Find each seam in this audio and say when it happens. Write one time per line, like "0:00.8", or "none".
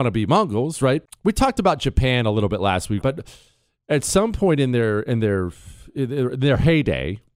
0:01.1
0:03.0